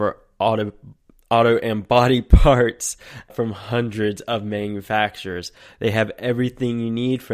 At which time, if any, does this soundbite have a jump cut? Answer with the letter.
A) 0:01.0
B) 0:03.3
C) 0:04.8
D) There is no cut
B